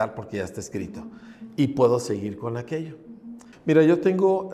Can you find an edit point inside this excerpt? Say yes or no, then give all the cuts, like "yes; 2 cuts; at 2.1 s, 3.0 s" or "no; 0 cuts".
yes; 1 cut; at 3.5 s